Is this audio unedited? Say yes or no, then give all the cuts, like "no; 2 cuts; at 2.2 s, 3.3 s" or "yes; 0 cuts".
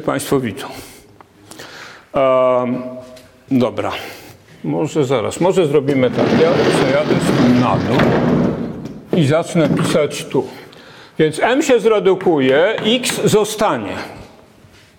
yes; 0 cuts